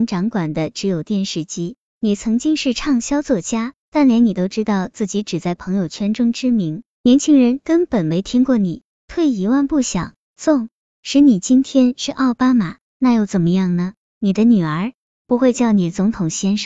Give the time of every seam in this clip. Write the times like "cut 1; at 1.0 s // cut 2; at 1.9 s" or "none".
cut 1; at 3.8 s